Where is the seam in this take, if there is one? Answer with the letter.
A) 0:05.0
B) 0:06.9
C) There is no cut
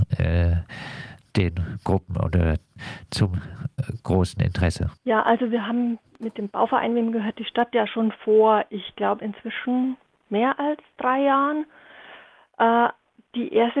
A